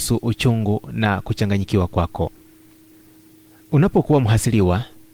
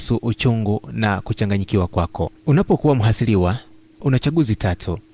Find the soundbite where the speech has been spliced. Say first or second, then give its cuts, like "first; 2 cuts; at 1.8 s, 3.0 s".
second; 1 cut; at 2.4 s